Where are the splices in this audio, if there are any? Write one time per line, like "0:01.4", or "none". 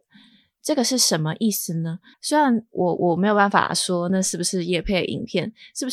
0:02.1